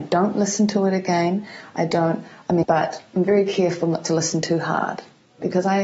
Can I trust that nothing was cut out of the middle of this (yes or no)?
no